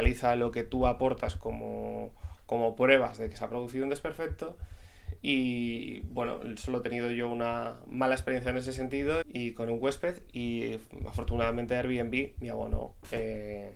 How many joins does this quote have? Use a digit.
1